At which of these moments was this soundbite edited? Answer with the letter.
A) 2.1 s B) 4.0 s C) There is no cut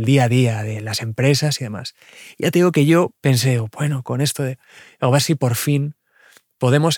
B